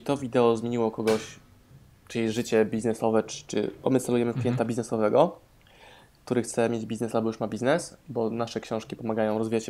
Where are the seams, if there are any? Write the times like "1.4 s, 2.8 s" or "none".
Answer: none